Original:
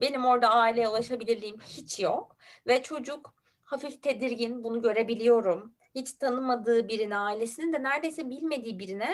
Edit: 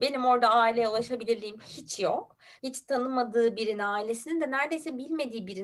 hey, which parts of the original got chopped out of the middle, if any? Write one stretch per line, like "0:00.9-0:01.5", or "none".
0:02.6-0:05.9